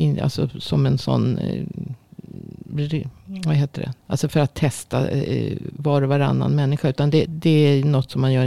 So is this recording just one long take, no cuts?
no; 2 cuts; at 4.0 s, 7.3 s

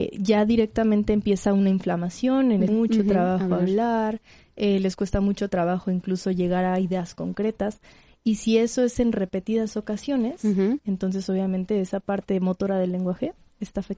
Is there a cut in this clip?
yes; 1 cut; at 2.7 s

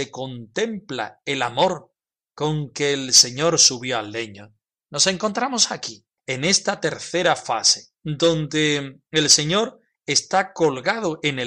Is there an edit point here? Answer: no; 0 cuts

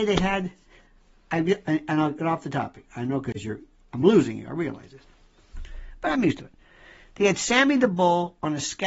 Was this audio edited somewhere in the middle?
no; 0 cuts

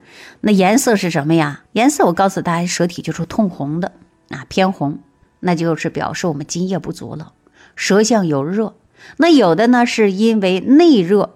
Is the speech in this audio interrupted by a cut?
no; 0 cuts

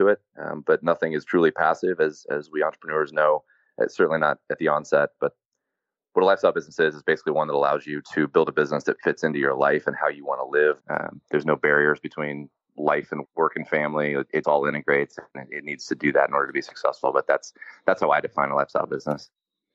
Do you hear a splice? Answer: yes; 3 cuts; at 10.8 s, 13.2 s, 14.4 s

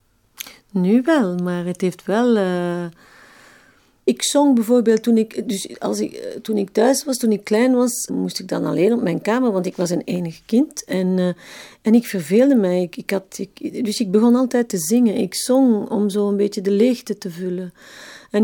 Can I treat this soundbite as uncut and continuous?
no; 1 cut; at 8.1 s

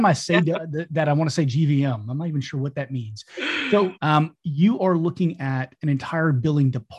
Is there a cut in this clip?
yes; 1 cut; at 3.9 s

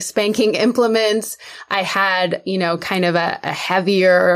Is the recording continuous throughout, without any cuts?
yes; 0 cuts

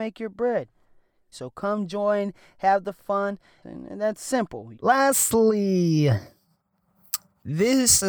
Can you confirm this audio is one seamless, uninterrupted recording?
no; 3 cuts; at 1.3 s, 3.6 s, 4.7 s

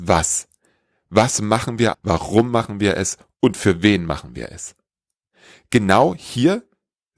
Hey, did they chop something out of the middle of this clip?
yes; 1 cut; at 1.9 s

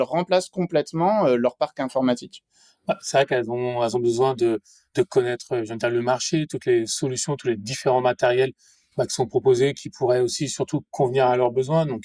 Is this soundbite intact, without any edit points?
yes; 0 cuts

